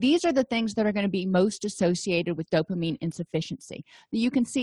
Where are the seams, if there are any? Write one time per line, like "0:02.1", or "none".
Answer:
none